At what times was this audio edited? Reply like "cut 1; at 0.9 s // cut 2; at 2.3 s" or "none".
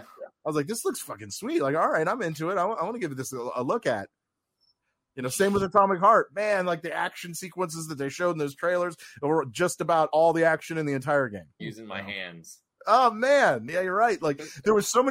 cut 1; at 11.6 s // cut 2; at 12.8 s